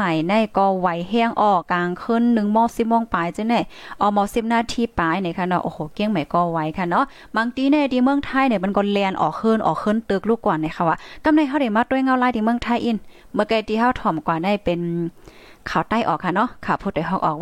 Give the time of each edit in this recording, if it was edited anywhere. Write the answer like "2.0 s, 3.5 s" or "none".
1.6 s